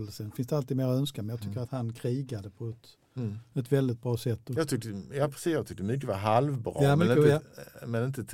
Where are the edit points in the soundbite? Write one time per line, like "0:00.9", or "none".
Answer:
none